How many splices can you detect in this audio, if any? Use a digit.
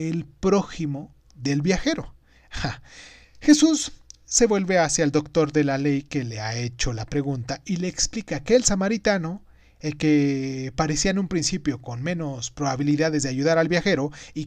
1